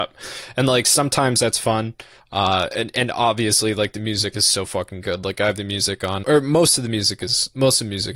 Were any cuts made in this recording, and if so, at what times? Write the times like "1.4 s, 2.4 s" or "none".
2.2 s, 4.3 s, 6.2 s